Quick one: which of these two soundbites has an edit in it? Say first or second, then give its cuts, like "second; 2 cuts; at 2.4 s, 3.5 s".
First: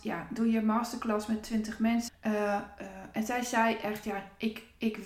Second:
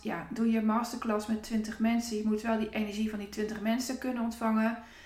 first; 1 cut; at 2.1 s